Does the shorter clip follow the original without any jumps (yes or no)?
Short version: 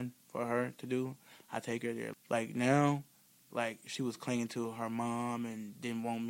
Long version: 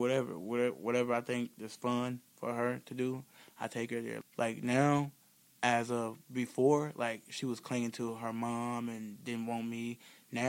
no